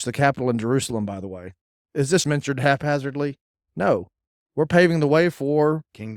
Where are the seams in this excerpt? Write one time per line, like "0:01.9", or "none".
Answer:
0:02.2

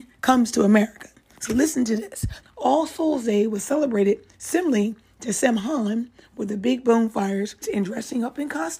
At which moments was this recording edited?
0:02.4
0:07.6

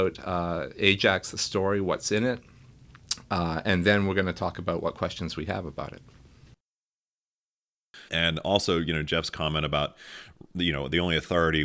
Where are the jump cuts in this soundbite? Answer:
0:08.1

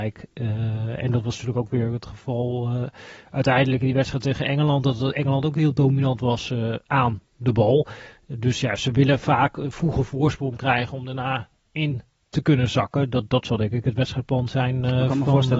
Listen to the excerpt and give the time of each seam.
none

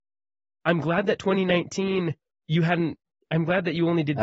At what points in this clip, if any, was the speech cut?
none

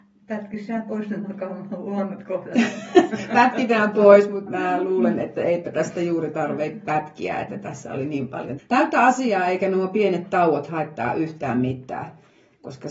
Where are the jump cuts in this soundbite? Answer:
0:04.5
0:08.6

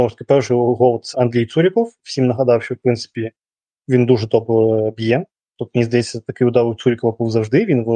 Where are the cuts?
none

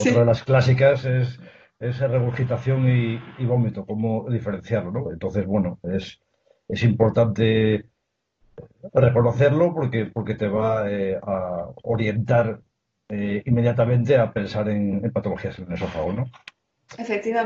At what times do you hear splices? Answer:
0:05.0

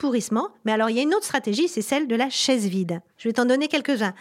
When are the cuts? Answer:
0:03.2

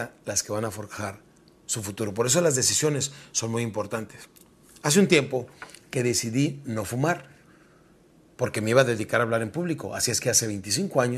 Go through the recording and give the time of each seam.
none

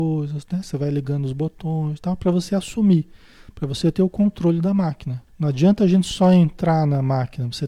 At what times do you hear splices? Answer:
0:05.3

